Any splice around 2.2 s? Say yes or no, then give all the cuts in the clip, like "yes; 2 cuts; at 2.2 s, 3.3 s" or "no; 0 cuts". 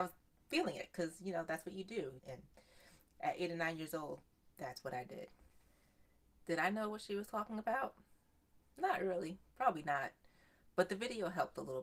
yes; 1 cut; at 2.2 s